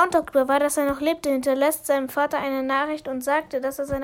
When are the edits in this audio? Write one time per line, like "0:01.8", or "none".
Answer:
none